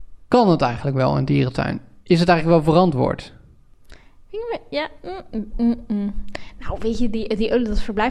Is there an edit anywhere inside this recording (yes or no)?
no